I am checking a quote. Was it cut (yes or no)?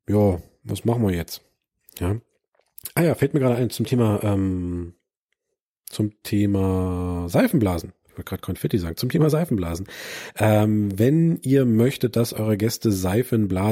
no